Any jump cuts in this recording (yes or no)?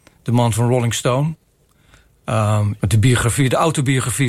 yes